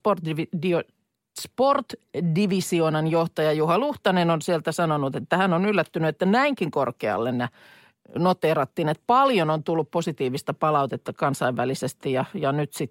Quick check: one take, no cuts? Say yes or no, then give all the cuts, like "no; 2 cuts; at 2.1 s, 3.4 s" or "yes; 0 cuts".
yes; 0 cuts